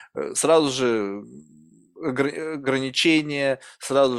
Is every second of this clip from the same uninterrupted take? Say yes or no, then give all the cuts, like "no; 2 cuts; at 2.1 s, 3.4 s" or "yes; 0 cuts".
yes; 0 cuts